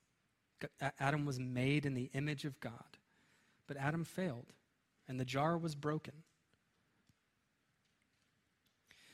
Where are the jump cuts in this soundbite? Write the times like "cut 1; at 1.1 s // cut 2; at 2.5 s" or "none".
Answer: cut 1; at 5.0 s